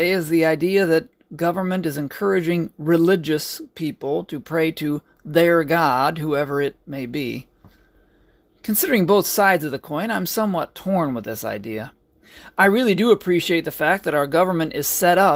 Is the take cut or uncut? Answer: uncut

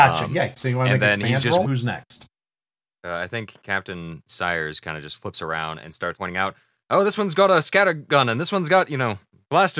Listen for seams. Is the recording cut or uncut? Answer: cut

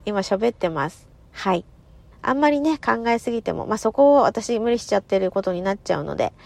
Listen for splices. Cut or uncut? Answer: cut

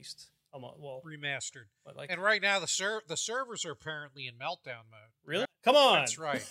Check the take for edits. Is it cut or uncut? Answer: cut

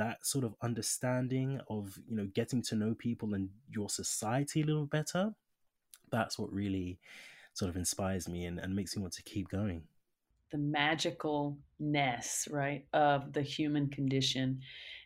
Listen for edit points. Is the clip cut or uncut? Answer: uncut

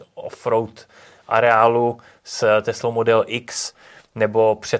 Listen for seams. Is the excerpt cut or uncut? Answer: uncut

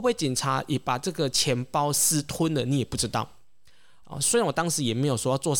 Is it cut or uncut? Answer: cut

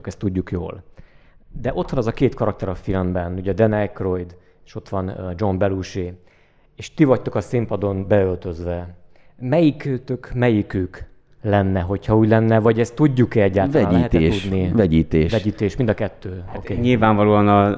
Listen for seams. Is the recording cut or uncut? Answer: uncut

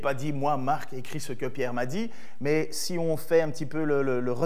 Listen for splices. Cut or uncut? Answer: uncut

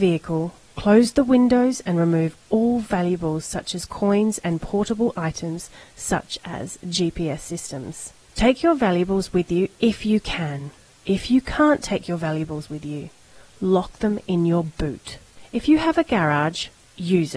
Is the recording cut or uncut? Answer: uncut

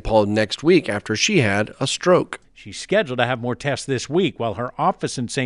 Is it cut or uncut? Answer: cut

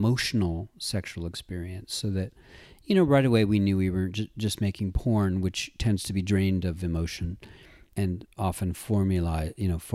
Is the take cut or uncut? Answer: uncut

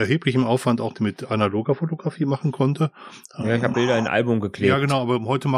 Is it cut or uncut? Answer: cut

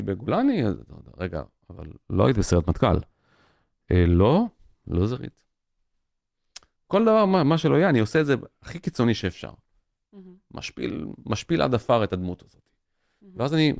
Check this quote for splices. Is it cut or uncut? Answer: cut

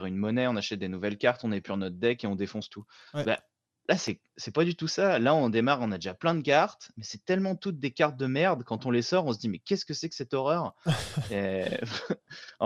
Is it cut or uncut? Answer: uncut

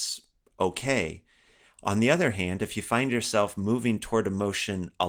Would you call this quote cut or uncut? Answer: uncut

